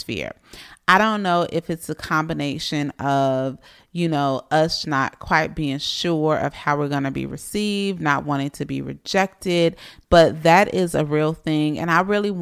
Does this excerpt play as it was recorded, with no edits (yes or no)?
no